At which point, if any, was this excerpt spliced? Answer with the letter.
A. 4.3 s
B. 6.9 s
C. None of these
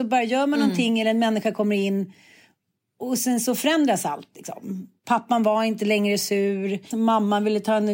B